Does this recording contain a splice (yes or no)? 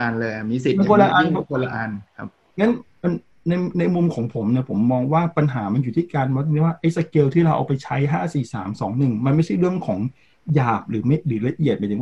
no